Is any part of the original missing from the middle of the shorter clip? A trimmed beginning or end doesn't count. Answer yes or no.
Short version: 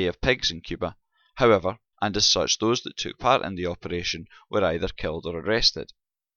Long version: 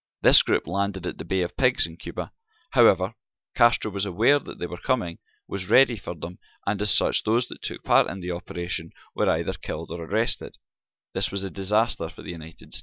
yes